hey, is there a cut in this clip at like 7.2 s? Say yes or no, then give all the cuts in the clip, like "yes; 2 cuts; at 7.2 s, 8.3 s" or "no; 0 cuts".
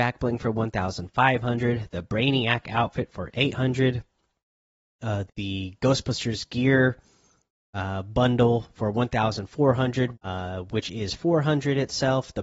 no; 2 cuts; at 5.3 s, 10.1 s